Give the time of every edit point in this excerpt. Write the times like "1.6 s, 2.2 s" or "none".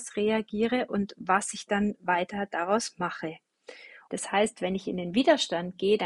4.1 s